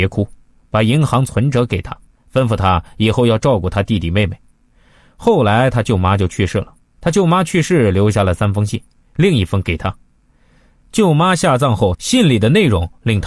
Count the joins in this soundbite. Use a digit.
2